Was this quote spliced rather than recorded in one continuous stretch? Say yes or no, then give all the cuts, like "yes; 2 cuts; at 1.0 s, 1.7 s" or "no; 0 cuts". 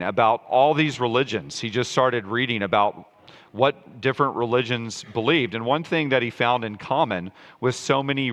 no; 0 cuts